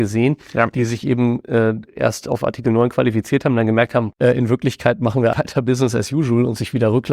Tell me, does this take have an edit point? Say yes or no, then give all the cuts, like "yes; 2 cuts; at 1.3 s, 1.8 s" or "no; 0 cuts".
yes; 2 cuts; at 4.1 s, 5.3 s